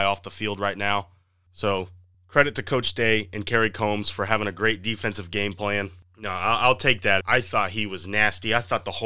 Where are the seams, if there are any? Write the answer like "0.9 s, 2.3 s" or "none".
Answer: 7.2 s